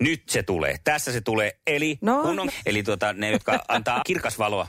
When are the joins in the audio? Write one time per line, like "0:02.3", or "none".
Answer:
0:02.5